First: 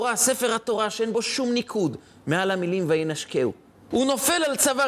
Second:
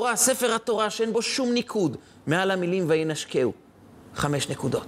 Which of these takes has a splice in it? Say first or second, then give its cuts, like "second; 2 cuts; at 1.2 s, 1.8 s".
first; 1 cut; at 3.9 s